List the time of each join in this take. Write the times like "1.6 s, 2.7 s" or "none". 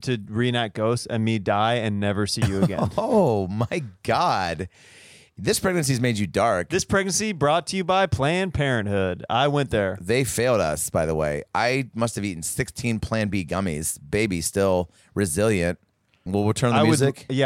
16.3 s